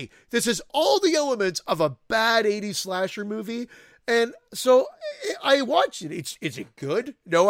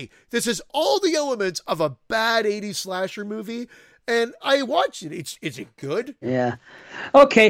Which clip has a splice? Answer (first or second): second